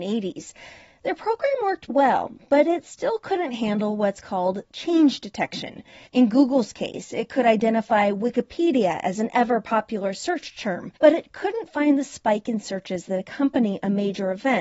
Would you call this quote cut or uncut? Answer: cut